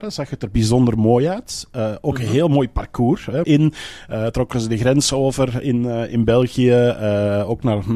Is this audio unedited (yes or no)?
no